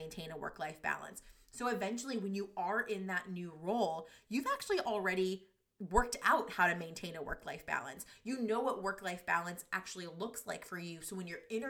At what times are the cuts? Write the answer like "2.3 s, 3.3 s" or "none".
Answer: none